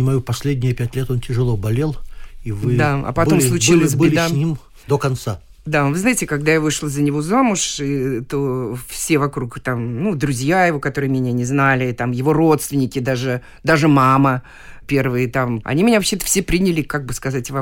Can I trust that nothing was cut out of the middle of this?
no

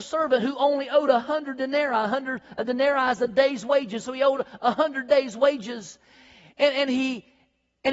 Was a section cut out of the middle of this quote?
no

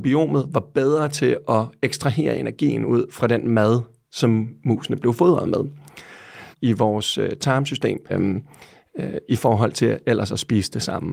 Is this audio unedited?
no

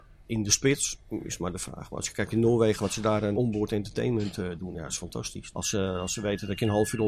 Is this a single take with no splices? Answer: no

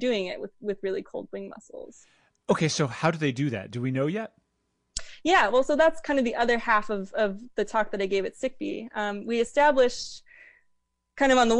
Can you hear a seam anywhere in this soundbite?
no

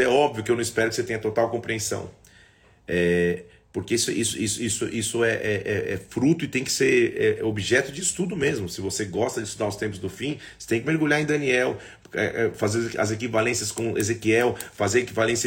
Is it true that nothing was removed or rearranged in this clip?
yes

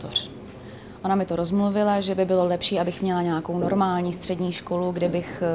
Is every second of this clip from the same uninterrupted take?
yes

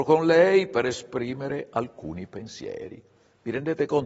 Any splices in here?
no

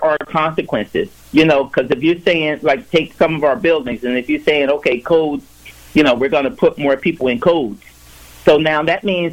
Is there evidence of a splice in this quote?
no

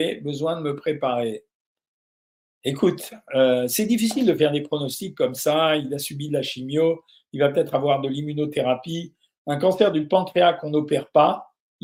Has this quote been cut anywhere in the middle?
no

